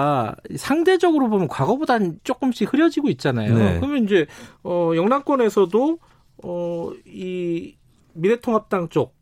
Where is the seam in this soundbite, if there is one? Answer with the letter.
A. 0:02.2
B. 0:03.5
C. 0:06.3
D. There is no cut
A